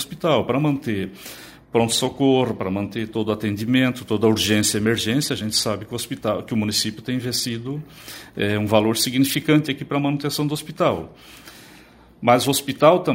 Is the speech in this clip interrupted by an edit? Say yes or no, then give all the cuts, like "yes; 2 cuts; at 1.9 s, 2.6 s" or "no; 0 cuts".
no; 0 cuts